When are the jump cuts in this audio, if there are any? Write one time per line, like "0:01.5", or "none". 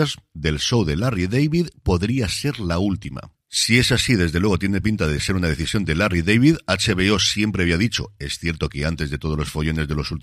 none